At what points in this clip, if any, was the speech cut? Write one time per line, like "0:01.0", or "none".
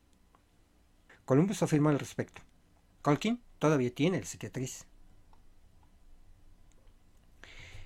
0:01.1
0:03.0